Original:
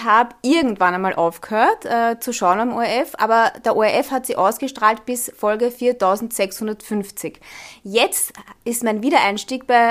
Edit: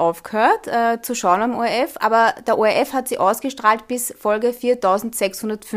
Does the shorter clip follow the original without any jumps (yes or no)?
yes